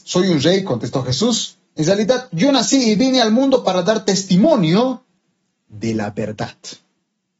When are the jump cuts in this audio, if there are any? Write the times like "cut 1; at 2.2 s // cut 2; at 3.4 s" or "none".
none